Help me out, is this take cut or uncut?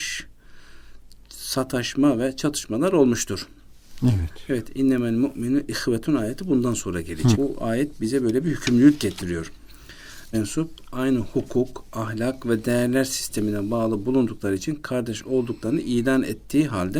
cut